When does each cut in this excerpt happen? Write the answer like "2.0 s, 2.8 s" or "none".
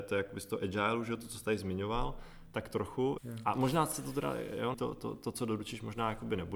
3.2 s, 4.7 s